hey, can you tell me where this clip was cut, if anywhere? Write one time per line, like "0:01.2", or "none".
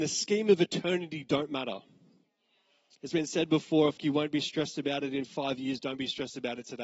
0:04.0